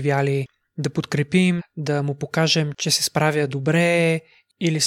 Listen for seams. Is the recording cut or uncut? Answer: cut